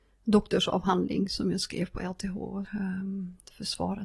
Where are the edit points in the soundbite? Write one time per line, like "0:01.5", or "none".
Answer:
0:02.6